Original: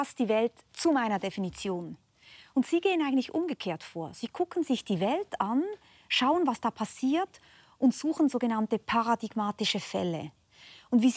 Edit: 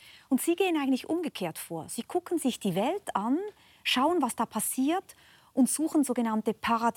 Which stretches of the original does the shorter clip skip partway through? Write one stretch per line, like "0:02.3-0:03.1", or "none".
none

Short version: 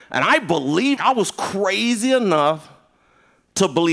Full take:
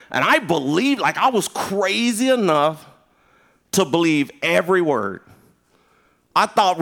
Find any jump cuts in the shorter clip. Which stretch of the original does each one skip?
0:01.0-0:01.1

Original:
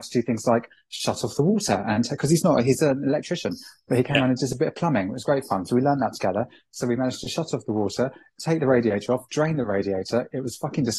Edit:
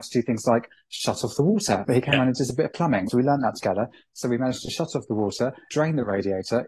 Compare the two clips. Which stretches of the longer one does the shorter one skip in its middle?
0:01.8-0:03.9
0:05.1-0:05.7
0:08.3-0:09.3

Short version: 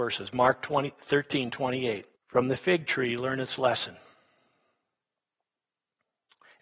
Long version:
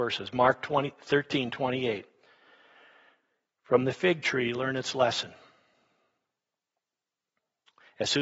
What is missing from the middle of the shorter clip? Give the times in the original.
0:02.2-0:03.5

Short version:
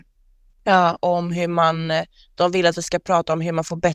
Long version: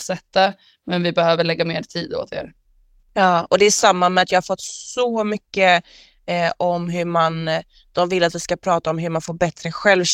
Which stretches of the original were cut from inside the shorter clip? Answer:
0:03.5-0:06.6

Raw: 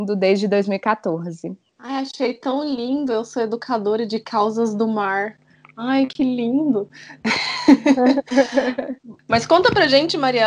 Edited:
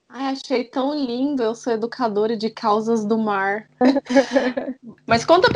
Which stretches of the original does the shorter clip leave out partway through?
0:05.5-0:08.0

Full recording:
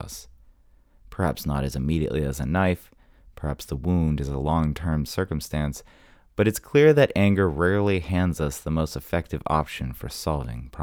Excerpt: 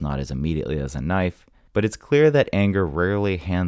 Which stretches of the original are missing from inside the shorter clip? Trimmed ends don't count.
0:03.1-0:06.3

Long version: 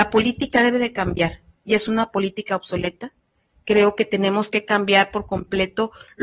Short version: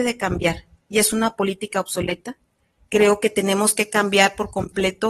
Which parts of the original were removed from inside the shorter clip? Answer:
none

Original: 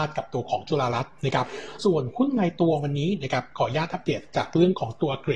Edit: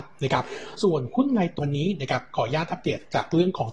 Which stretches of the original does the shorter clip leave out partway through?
0:02.6-0:02.8

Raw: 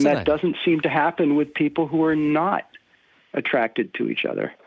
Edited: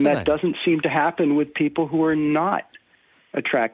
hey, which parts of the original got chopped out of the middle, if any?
none

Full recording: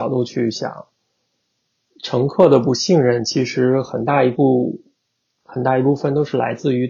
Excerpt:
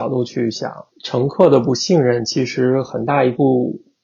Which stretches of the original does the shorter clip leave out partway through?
0:00.9-0:01.9

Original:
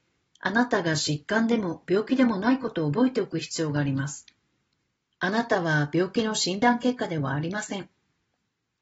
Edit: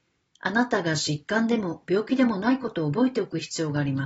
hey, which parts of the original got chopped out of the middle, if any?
none

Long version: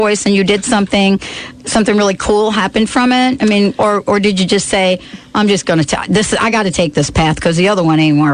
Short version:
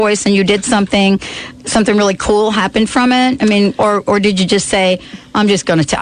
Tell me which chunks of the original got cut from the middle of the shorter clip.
none

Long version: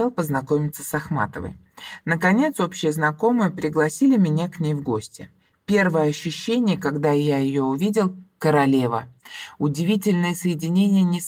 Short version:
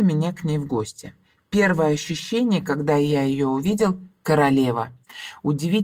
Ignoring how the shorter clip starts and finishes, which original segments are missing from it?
none

